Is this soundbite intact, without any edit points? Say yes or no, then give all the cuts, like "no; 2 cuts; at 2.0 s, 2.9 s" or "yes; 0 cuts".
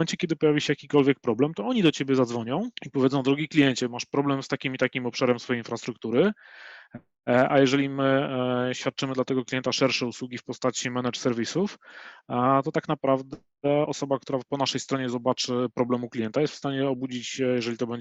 no; 1 cut; at 2.8 s